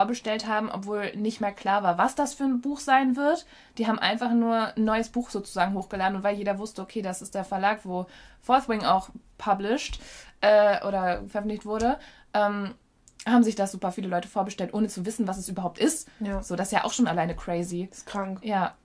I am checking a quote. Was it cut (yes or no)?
no